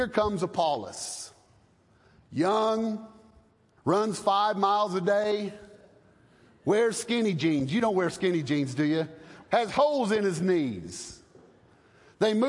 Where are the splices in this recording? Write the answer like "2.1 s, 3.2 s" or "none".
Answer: 3.8 s, 9.4 s